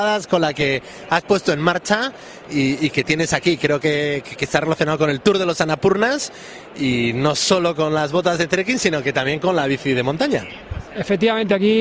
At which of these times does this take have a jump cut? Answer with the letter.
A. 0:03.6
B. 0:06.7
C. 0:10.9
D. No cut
D